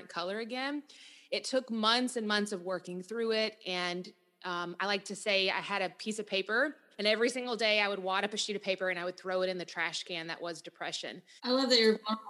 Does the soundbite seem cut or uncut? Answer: cut